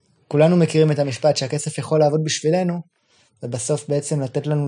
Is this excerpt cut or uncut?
uncut